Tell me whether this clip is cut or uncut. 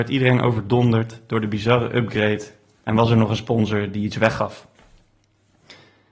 uncut